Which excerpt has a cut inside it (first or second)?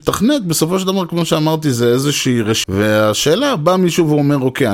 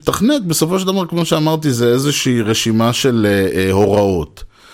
first